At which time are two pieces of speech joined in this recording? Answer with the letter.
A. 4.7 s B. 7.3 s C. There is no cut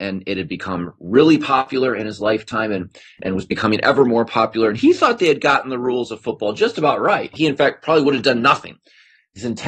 B